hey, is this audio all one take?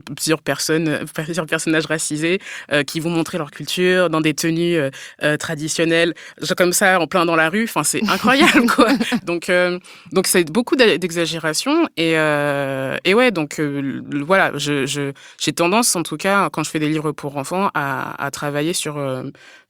no; 1 cut; at 9.2 s

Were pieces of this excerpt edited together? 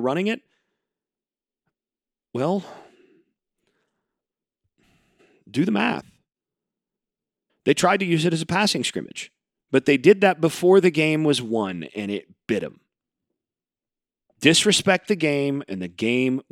yes; 1 cut; at 7.5 s

